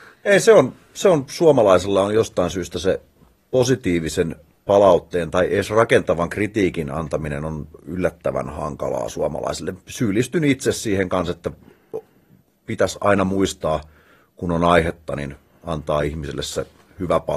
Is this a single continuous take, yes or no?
yes